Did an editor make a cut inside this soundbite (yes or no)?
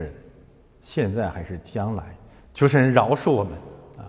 yes